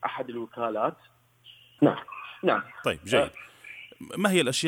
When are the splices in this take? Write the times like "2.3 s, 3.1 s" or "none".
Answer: 1.8 s